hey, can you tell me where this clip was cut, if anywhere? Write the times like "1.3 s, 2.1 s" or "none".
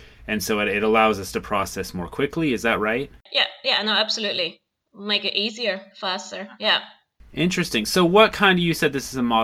none